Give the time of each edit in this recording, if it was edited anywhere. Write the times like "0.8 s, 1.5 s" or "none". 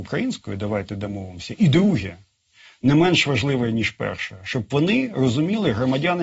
none